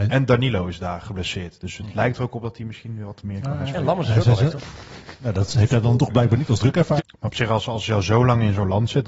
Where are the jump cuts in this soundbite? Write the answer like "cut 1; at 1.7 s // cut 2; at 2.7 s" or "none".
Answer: cut 1; at 4.6 s // cut 2; at 7.0 s